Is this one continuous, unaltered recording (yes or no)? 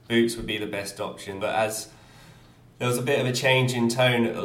no